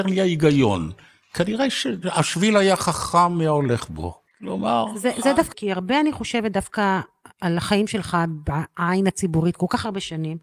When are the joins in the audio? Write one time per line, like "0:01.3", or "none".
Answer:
0:04.3
0:05.5